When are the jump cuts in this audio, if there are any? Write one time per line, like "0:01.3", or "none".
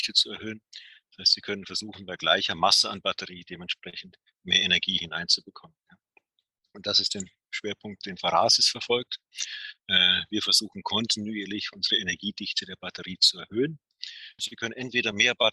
0:14.4